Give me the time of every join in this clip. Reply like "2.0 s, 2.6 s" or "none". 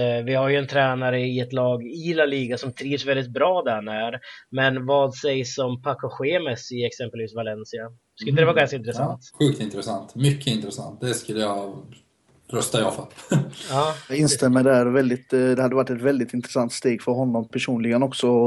9.3 s